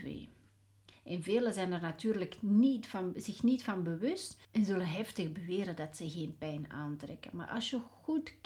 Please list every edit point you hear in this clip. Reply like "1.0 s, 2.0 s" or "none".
0.9 s, 4.4 s

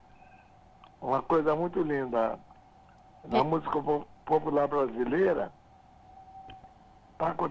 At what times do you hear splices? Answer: none

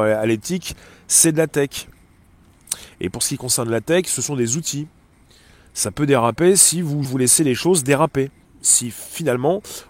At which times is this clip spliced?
7.1 s, 8.4 s

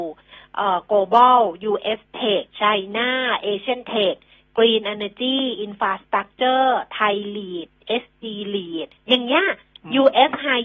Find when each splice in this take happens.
2.5 s, 9.0 s

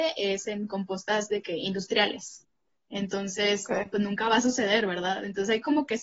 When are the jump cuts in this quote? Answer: none

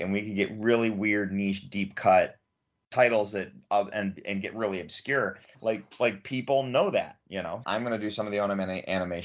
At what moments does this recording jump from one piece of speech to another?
5.5 s, 7.6 s

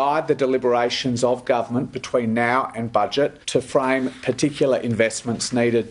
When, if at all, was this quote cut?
3.4 s

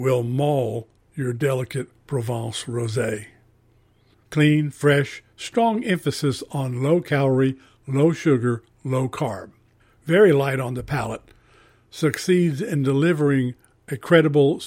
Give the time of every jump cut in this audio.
4.1 s

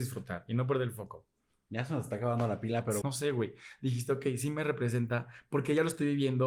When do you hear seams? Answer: 3.0 s

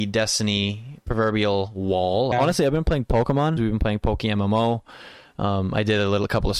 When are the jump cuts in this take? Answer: 2.3 s, 3.6 s

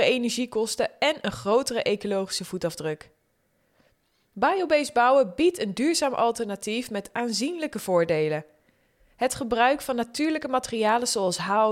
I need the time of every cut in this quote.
none

